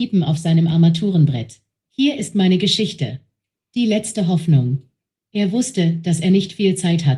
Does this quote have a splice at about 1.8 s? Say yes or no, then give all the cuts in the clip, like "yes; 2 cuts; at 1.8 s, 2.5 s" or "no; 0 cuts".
yes; 1 cut; at 1.8 s